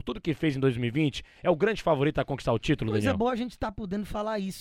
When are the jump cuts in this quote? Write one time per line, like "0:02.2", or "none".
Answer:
none